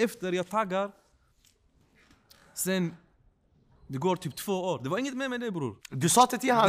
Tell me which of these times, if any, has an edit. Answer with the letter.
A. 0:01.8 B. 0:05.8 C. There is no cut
B